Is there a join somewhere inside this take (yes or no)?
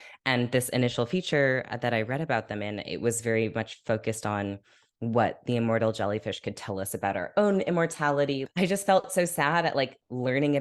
yes